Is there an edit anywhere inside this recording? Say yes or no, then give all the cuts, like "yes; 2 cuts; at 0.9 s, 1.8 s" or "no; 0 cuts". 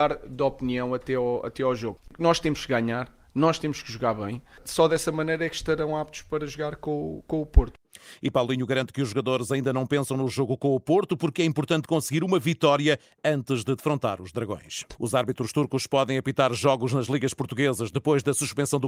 yes; 1 cut; at 15.0 s